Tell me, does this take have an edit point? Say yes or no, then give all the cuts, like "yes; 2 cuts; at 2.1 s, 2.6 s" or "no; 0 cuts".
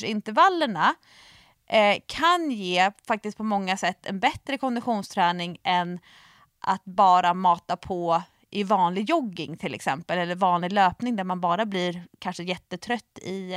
no; 0 cuts